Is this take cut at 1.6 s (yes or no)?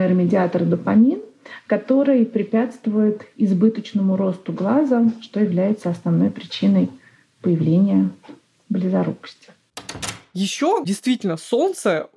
no